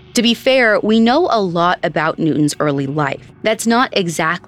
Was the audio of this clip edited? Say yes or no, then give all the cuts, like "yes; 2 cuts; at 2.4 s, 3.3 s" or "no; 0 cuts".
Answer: yes; 1 cut; at 3.3 s